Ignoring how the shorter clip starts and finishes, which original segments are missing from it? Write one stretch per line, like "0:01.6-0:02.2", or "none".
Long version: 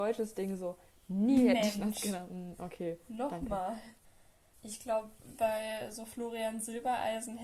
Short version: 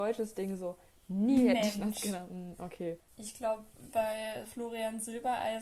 0:03.0-0:04.5
0:05.9-0:06.1